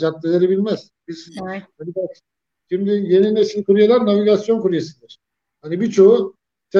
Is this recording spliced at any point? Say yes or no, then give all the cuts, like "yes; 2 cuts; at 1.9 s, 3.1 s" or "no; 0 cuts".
no; 0 cuts